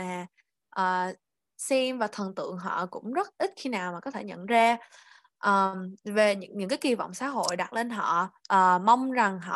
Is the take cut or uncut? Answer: uncut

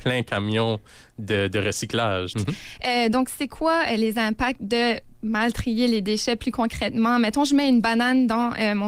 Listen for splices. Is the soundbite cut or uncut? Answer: cut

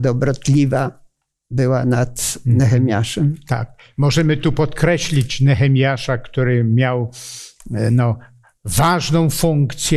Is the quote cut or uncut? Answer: uncut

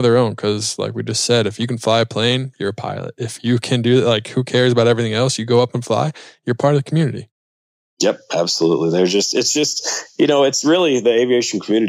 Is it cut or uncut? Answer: uncut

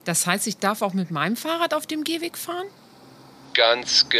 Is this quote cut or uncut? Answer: uncut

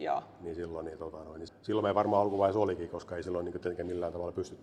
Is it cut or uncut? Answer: cut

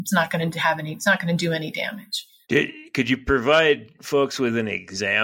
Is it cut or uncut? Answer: cut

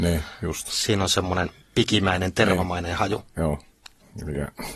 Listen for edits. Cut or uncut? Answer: uncut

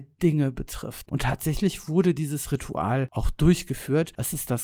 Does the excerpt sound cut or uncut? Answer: cut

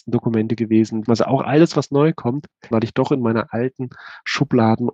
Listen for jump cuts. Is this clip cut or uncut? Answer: cut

